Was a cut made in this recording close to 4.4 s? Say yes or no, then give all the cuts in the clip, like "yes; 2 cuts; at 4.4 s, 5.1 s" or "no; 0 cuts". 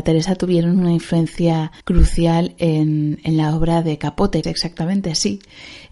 yes; 2 cuts; at 1.8 s, 4.4 s